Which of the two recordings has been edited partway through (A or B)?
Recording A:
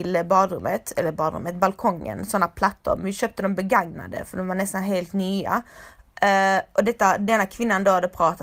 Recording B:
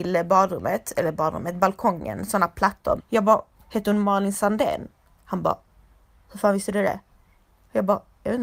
B